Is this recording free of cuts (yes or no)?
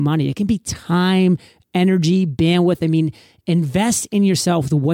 yes